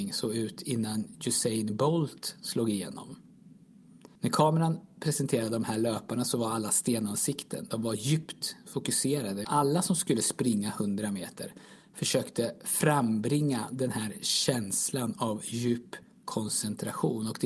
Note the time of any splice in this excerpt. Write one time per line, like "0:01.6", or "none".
0:04.2
0:09.4